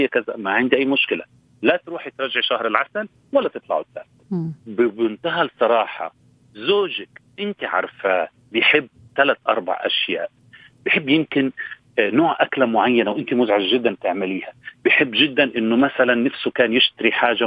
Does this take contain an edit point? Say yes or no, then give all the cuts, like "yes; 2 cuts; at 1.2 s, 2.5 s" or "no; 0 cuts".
yes; 1 cut; at 4.6 s